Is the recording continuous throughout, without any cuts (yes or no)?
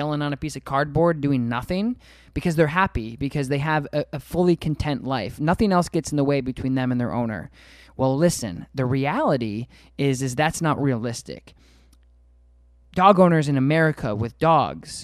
yes